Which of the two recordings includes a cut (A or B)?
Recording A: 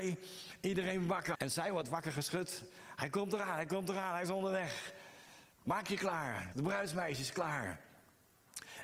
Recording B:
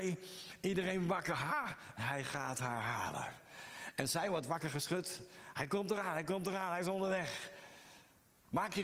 A